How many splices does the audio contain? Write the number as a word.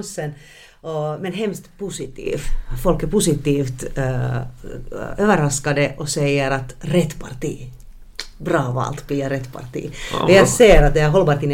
zero